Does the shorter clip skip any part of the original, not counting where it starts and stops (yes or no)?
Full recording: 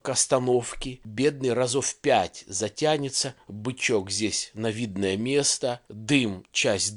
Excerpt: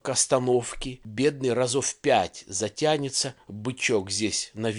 no